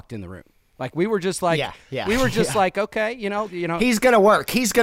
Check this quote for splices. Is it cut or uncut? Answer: cut